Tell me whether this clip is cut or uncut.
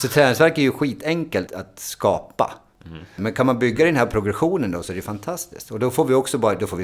cut